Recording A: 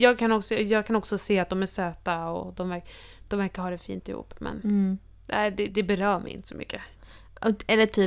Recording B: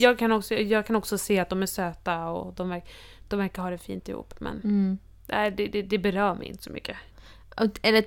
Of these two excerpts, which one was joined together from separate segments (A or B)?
A